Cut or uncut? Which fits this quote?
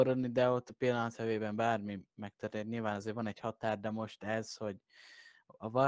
uncut